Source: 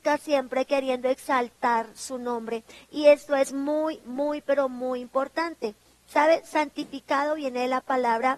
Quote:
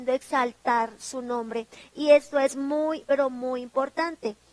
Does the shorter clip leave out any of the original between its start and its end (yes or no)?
yes